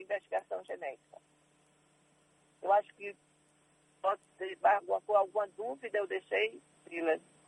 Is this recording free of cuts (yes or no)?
yes